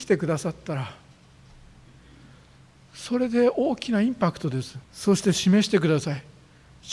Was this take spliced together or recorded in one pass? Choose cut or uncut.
cut